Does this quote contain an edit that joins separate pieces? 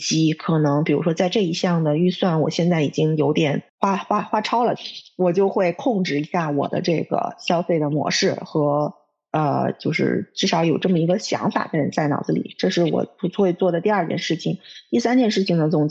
yes; 1 cut; at 3.7 s

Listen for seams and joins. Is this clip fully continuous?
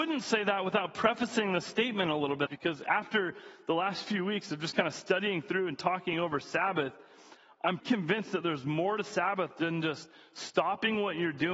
no; 2 cuts; at 2.5 s, 7.8 s

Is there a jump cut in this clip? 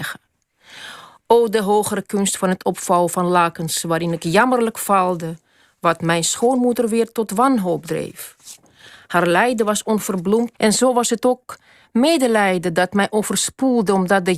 yes; 1 cut; at 10.5 s

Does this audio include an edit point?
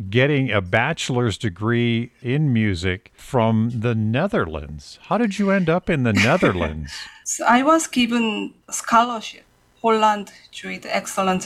yes; 2 cuts; at 7.2 s, 8.6 s

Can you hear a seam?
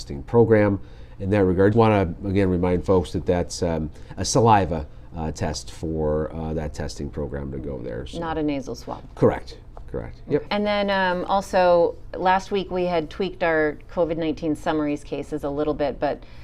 yes; 2 cuts; at 1.7 s, 10.5 s

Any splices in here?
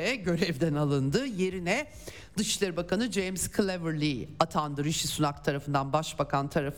no; 0 cuts

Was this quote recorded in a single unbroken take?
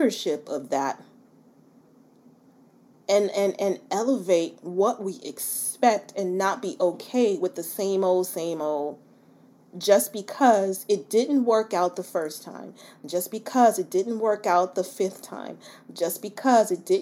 yes; 0 cuts

